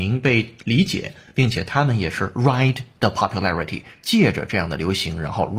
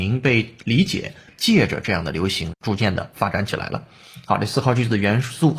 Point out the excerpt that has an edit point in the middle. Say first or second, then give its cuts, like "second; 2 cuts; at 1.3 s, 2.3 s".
second; 2 cuts; at 1.3 s, 2.5 s